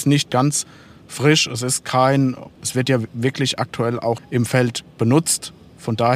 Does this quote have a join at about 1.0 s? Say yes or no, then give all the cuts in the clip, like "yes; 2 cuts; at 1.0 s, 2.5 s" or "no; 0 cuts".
no; 2 cuts; at 2.6 s, 4.2 s